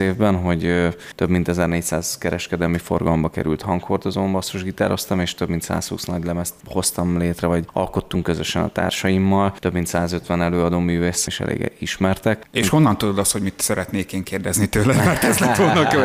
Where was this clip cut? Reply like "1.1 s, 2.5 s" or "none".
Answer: 11.3 s